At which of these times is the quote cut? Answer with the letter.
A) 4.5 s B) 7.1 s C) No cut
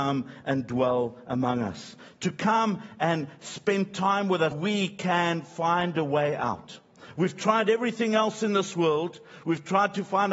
A